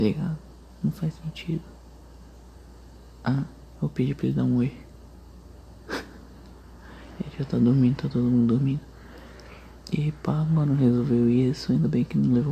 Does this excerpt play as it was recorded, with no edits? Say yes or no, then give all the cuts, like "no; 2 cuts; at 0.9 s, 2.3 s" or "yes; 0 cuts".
no; 1 cut; at 3.7 s